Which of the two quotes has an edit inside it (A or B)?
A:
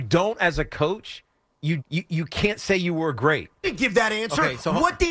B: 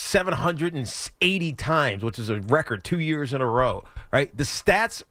A